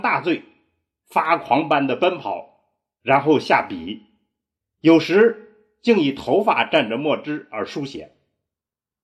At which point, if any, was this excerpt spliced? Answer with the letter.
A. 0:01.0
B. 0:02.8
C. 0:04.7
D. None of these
A